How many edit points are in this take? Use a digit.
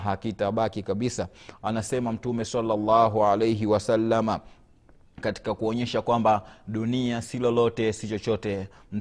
1